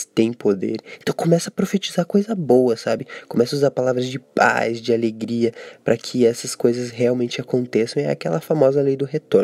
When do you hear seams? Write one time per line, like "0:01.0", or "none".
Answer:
none